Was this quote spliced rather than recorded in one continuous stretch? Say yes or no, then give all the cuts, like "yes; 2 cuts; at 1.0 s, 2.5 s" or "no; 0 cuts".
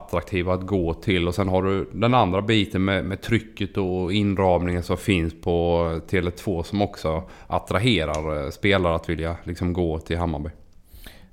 no; 0 cuts